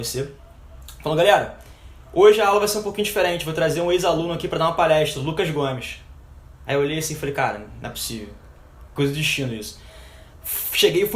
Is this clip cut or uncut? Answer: uncut